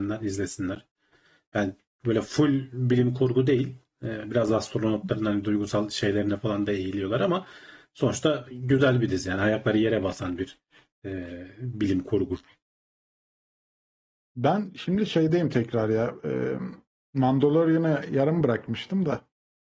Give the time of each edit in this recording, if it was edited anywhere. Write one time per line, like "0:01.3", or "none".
none